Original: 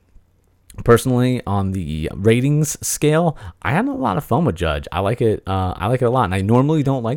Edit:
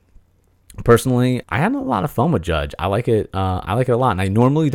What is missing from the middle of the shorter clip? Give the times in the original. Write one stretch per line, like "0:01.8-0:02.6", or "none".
0:01.4-0:03.6